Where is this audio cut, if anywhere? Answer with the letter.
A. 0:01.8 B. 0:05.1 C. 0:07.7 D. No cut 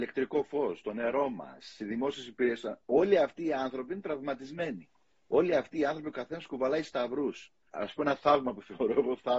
C